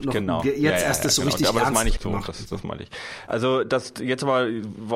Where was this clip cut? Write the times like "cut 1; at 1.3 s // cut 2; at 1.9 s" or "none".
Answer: cut 1; at 2.0 s // cut 2; at 3.3 s